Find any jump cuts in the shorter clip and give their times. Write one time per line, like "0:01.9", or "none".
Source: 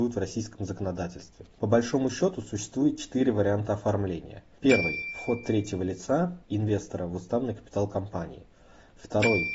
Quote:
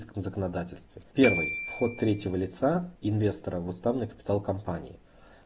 0:01.0